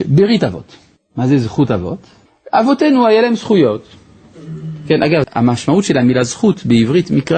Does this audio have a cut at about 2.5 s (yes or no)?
no